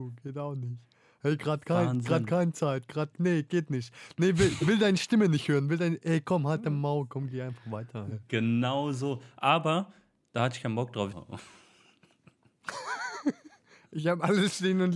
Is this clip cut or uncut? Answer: cut